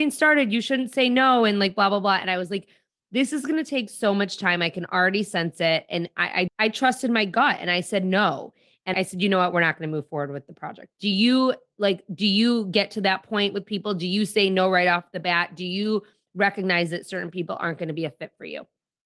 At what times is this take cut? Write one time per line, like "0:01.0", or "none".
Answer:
0:06.5
0:08.9